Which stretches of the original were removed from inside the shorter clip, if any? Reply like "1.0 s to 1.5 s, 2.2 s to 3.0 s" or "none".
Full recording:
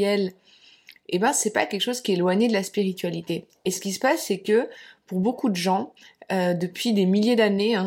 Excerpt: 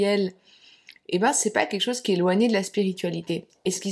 none